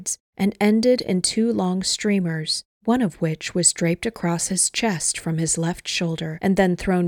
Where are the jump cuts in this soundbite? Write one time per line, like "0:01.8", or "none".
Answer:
none